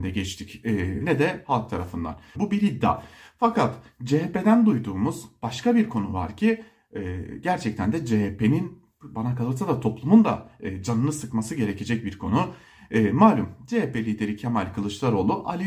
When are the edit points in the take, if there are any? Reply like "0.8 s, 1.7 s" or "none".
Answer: 1.0 s, 2.3 s